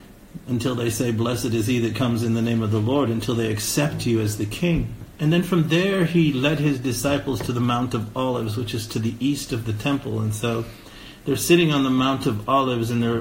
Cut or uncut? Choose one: cut